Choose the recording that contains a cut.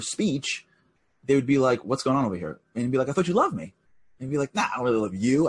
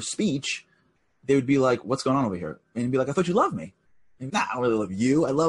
second; 1 cut; at 4.3 s

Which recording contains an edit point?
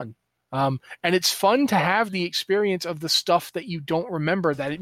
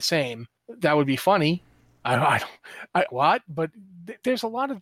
second; 1 cut; at 3.1 s

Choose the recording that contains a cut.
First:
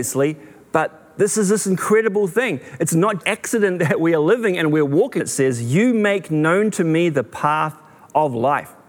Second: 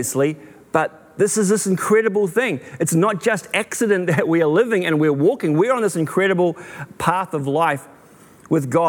first; 2 cuts; at 3.2 s, 5.2 s

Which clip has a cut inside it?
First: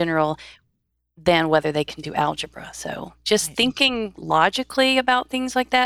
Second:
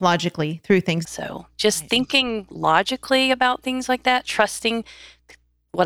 second; 1 cut; at 1.1 s

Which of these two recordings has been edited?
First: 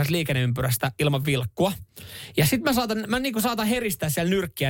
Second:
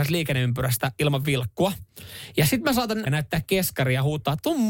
second; 1 cut; at 3.1 s

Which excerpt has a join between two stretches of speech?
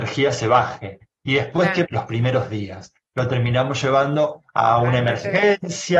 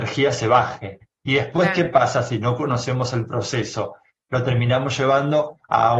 first; 2 cuts; at 1.8 s, 3.0 s

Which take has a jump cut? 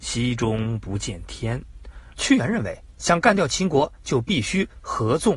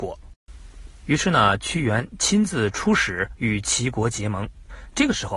first; 1 cut; at 2.1 s

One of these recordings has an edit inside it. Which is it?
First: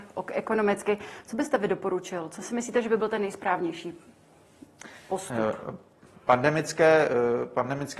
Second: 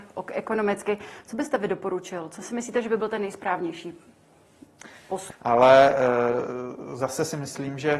second; 1 cut; at 5.3 s

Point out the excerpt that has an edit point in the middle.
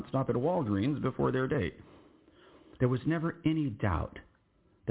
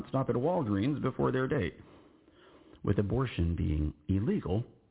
first; 1 cut; at 2.8 s

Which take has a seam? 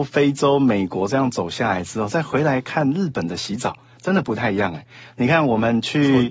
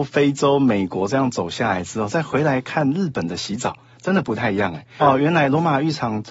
second; 1 cut; at 5.0 s

